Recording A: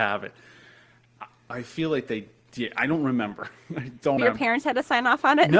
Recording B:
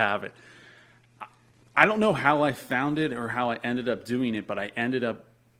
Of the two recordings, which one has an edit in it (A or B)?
A